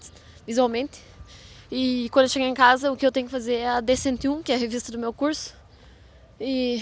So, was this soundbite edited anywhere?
no; 0 cuts

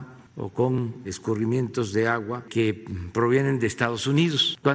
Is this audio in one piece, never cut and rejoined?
no; 1 cut; at 1.0 s

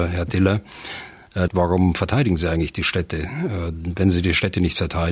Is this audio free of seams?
no; 1 cut; at 1.5 s

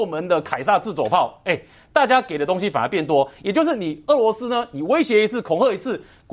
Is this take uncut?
yes; 0 cuts

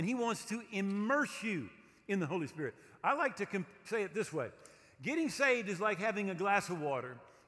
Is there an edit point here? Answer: no; 0 cuts

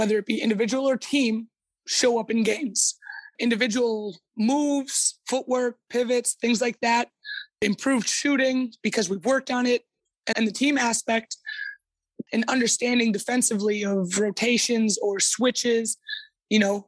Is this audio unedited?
no; 2 cuts; at 10.3 s, 12.3 s

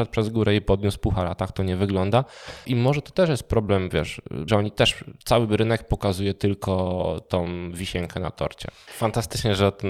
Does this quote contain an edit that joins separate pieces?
yes; 3 cuts; at 2.6 s, 4.5 s, 8.9 s

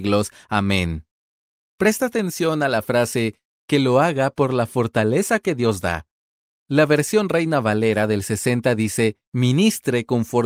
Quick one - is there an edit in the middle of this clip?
no; 0 cuts

